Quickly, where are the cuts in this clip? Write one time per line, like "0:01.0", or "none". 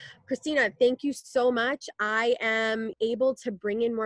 0:02.9